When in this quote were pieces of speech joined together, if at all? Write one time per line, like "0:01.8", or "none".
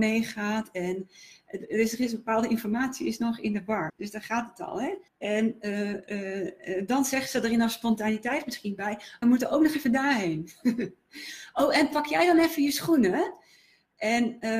0:03.9
0:05.1
0:09.2

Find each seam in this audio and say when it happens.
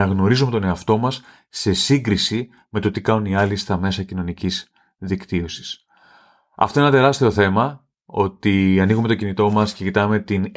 none

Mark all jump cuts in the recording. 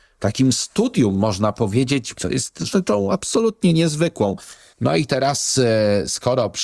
0:02.1
0:04.7

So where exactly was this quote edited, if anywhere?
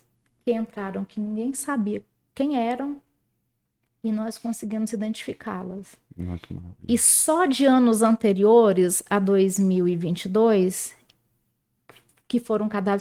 none

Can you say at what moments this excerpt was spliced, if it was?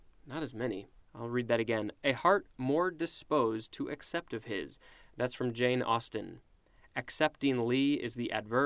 0:01.0

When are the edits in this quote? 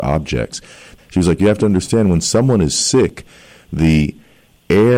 0:01.0

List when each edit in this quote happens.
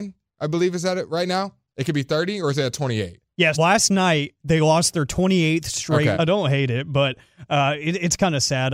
0:03.5
0:06.1

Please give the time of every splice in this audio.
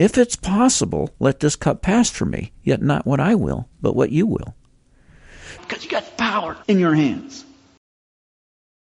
0:05.6
0:06.6

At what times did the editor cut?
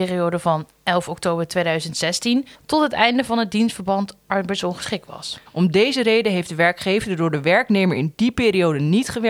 0:02.5
0:05.4

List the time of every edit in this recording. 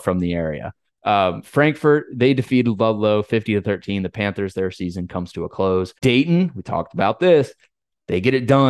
0:06.0

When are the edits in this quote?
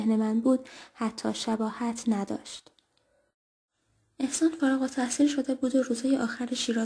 none

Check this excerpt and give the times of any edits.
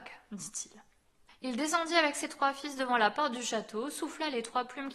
none

